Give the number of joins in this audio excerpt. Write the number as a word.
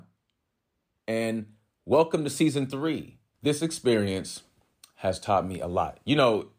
one